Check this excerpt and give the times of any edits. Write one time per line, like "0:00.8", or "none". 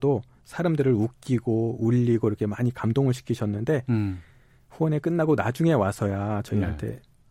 none